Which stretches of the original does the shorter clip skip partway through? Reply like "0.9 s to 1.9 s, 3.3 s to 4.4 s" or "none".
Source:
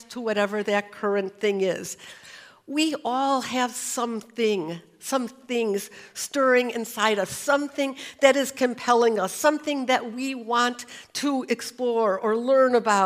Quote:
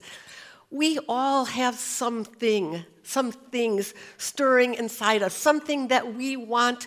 7.3 s to 9.3 s